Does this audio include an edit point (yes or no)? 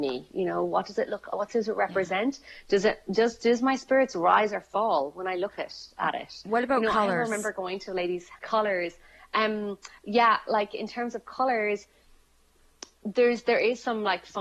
yes